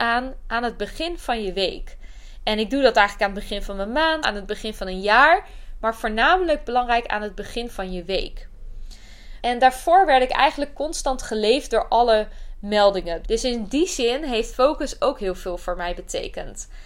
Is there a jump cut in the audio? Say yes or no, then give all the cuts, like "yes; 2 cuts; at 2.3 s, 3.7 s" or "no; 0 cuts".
yes; 3 cuts; at 4.2 s, 9.4 s, 13.2 s